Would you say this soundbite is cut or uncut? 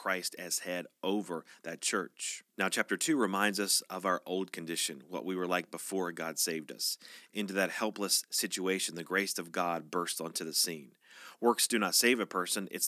cut